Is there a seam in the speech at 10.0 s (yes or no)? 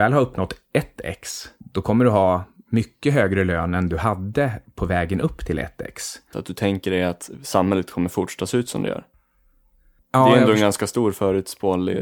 no